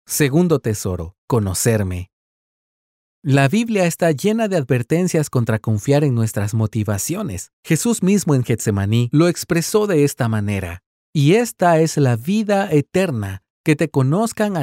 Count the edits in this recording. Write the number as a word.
two